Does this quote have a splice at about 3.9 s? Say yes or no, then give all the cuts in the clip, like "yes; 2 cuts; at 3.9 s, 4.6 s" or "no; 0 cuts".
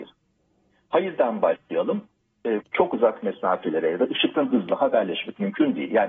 no; 1 cut; at 2.6 s